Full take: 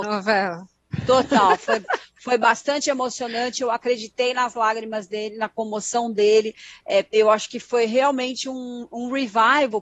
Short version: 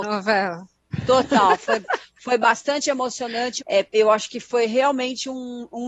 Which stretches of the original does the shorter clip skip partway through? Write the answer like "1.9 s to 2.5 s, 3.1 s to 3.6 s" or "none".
3.6 s to 6.8 s